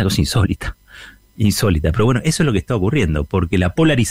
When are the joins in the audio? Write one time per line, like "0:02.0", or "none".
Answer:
none